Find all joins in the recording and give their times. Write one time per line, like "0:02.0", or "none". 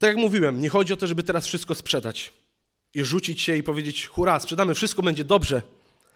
none